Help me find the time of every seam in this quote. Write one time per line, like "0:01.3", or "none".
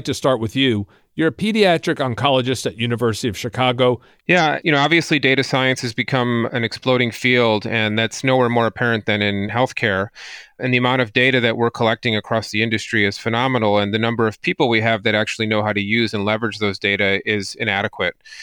0:04.2